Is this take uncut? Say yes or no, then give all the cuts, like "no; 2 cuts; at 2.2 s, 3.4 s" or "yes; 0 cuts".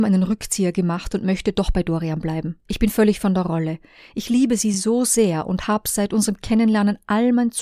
yes; 0 cuts